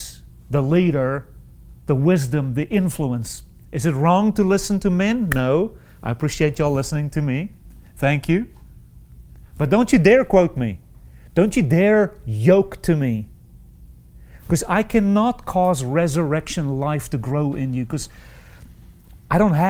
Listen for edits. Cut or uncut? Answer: uncut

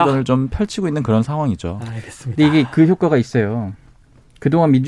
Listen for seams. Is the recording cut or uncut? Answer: uncut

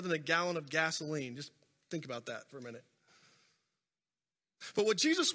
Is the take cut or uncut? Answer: uncut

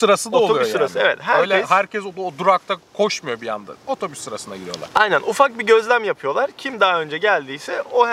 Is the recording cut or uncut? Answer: uncut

